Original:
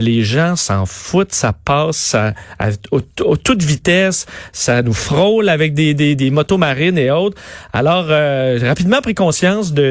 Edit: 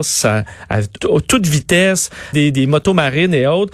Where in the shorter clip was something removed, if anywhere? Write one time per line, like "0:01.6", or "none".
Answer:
0:01.0
0:02.3